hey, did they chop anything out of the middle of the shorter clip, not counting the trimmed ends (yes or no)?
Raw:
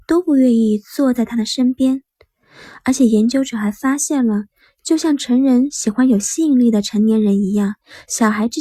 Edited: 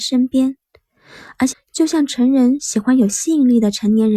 yes